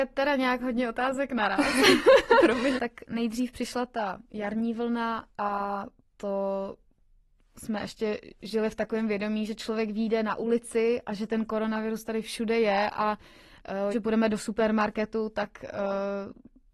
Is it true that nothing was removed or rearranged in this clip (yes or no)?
no